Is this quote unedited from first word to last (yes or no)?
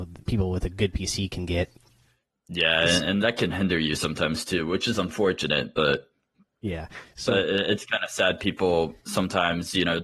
yes